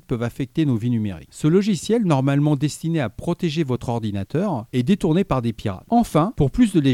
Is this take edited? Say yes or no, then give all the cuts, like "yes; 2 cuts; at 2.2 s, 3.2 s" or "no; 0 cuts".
yes; 2 cuts; at 1.3 s, 5.8 s